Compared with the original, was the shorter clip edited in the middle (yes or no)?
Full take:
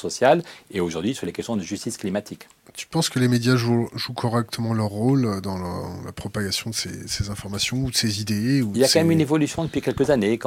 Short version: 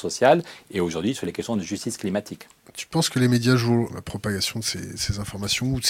yes